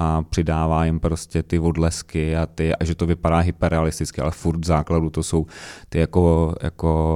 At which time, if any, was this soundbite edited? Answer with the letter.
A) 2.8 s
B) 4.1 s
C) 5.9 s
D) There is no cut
A